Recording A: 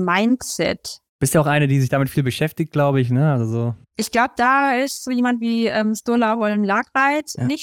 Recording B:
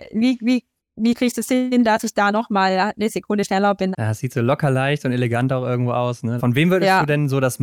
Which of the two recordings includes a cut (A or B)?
B